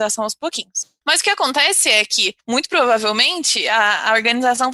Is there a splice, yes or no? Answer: no